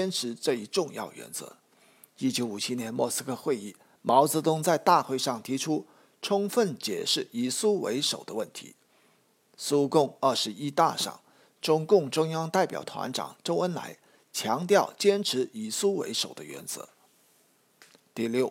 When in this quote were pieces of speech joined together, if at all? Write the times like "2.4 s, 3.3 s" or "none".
12.8 s